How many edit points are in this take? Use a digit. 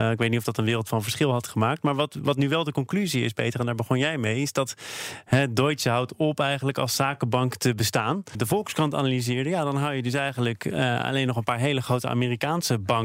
1